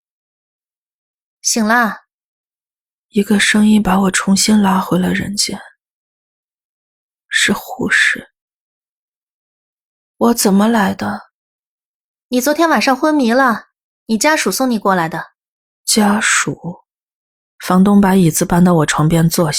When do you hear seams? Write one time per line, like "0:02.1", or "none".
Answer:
0:15.6
0:17.5